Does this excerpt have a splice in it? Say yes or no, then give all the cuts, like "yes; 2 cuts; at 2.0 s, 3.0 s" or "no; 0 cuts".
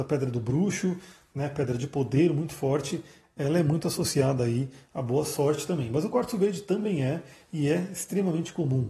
no; 0 cuts